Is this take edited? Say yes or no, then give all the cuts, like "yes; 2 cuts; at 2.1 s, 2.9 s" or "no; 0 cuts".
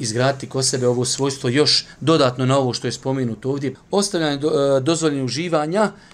yes; 1 cut; at 3.8 s